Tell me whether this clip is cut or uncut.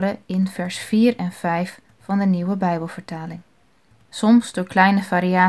cut